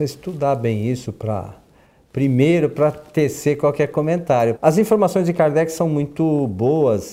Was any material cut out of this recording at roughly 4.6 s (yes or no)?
yes